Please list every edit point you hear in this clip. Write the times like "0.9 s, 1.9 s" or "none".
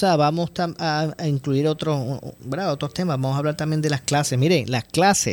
none